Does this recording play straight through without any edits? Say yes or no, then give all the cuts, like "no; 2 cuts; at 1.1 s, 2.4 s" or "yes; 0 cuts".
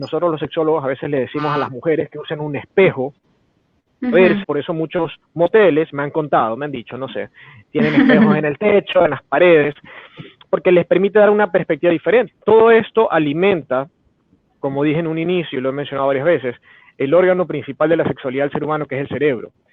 no; 2 cuts; at 4.4 s, 12.3 s